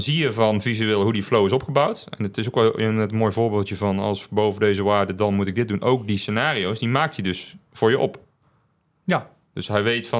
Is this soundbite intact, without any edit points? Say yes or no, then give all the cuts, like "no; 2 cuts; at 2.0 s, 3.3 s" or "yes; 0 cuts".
yes; 0 cuts